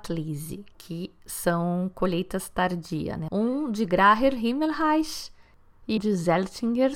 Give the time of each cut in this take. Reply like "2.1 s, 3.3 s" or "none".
3.3 s, 6.0 s